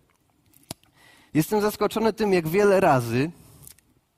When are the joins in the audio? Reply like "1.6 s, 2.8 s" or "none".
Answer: 1.3 s